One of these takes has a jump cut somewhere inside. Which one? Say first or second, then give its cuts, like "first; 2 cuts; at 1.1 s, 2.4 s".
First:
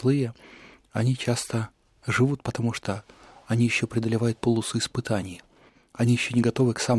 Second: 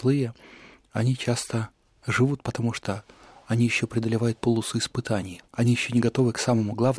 second; 1 cut; at 5.5 s